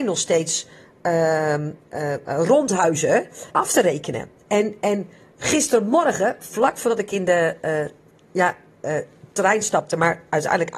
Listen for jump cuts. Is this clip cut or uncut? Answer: cut